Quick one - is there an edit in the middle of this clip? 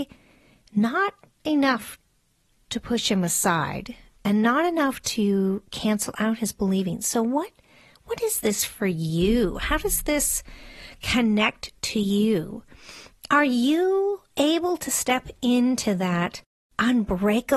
no; 0 cuts

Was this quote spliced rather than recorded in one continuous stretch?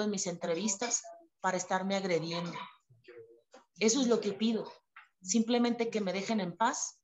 yes; 1 cut; at 5.1 s

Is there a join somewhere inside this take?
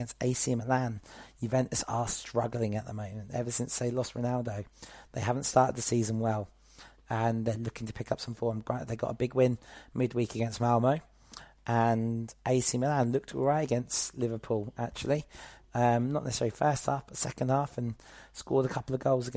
no; 0 cuts

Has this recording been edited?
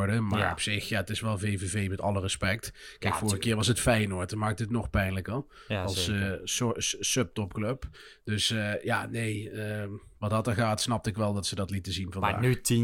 no; 0 cuts

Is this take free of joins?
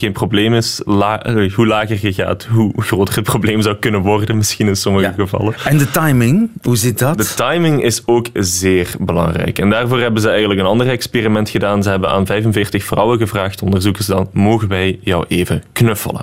yes; 0 cuts

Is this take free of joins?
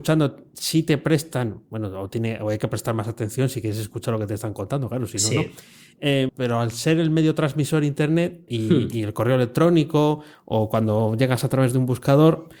no; 2 cuts; at 6.3 s, 8.5 s

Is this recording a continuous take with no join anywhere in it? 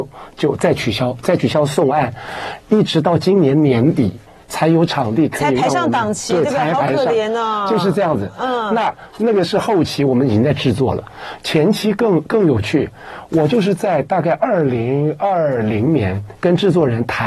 yes; 0 cuts

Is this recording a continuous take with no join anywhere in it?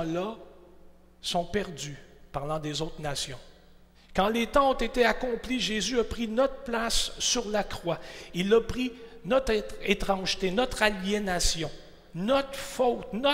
no; 1 cut; at 3.9 s

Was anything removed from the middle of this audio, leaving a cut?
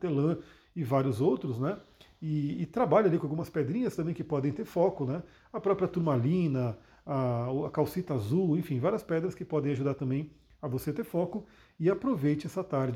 no; 0 cuts

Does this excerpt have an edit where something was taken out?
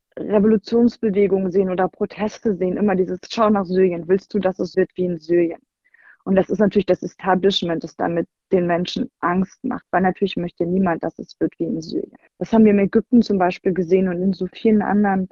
yes; 2 cuts; at 4.7 s, 12.3 s

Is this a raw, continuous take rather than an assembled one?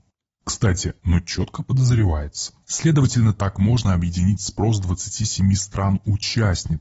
no; 2 cuts; at 1.0 s, 2.6 s

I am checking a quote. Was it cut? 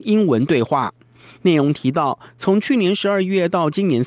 no; 0 cuts

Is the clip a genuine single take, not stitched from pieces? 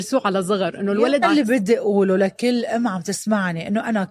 no; 1 cut; at 1.2 s

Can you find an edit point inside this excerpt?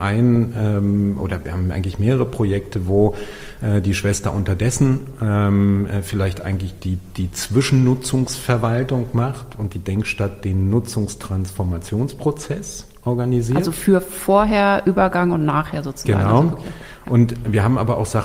no; 0 cuts

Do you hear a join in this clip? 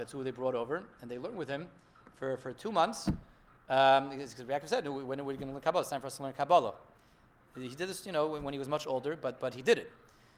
no; 0 cuts

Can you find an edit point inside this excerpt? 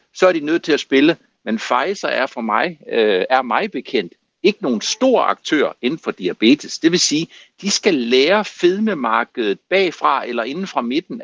yes; 1 cut; at 3.3 s

